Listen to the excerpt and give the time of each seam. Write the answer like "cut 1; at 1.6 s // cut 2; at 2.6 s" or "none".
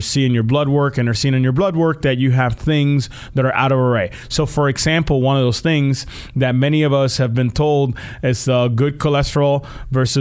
none